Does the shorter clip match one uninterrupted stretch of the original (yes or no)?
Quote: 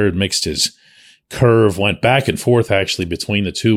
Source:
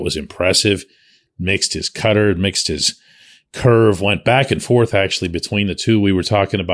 yes